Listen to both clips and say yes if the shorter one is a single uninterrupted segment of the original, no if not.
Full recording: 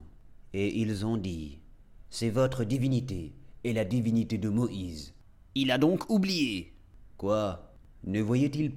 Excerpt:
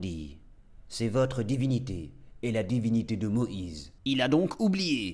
no